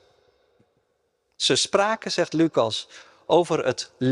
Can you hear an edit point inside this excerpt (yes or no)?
no